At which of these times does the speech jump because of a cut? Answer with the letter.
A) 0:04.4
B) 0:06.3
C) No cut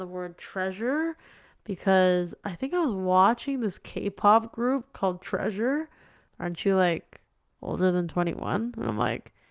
B